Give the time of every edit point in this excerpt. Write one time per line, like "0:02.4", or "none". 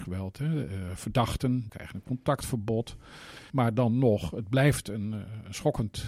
0:01.7
0:03.5